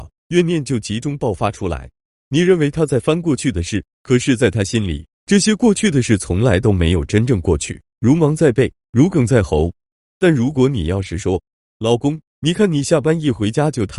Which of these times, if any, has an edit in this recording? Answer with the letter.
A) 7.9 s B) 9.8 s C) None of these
B